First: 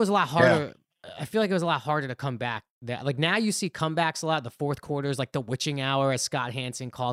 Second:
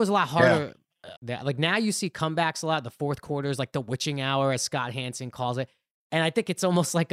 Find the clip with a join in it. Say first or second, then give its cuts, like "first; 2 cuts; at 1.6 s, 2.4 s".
second; 1 cut; at 1.1 s